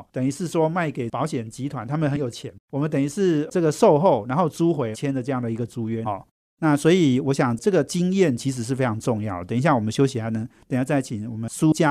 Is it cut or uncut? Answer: cut